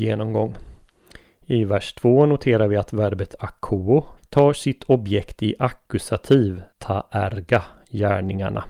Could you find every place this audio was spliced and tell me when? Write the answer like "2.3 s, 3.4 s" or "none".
4.2 s, 6.7 s